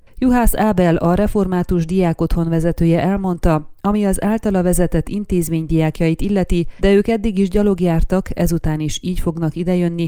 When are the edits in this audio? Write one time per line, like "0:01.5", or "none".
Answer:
0:06.8